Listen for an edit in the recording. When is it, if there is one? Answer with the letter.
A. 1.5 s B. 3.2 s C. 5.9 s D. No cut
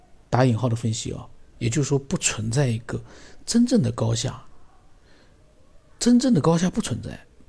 A